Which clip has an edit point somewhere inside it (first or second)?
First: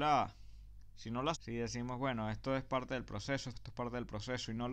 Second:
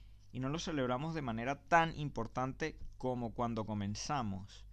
first